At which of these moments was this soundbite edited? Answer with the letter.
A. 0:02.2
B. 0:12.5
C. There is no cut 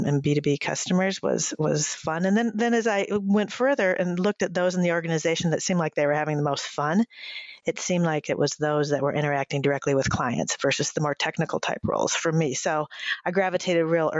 C